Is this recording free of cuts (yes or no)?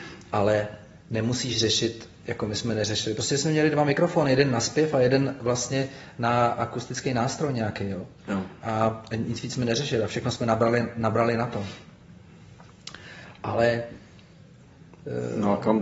yes